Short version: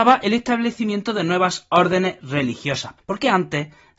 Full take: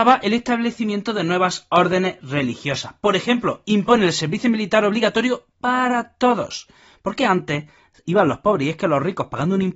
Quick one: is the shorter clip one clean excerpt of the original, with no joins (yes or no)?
no